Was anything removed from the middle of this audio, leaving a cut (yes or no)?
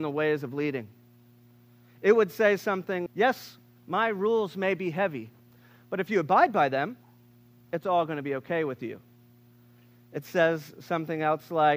yes